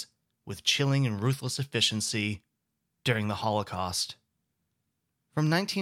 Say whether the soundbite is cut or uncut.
uncut